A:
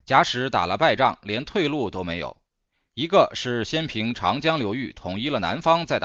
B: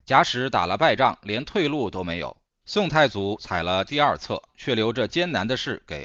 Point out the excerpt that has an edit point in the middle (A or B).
B